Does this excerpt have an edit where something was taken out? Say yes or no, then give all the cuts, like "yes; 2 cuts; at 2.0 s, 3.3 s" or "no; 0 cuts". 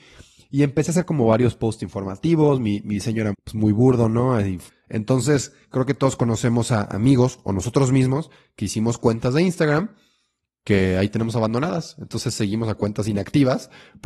yes; 2 cuts; at 3.3 s, 4.7 s